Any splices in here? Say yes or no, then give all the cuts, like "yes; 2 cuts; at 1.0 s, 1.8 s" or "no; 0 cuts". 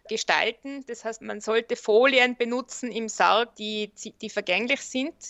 no; 0 cuts